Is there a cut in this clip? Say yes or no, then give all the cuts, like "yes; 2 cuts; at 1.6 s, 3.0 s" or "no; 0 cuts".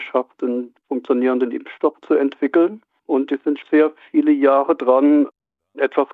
yes; 1 cut; at 3.6 s